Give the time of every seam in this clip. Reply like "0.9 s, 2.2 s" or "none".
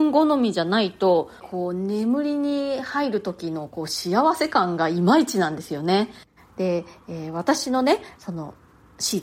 1.4 s, 6.4 s